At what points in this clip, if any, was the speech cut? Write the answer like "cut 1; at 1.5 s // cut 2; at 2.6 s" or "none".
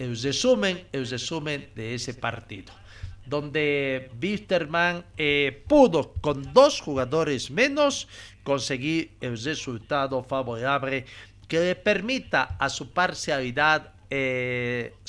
none